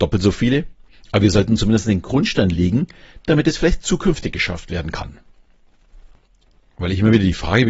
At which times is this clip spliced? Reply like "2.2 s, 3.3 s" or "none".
0.9 s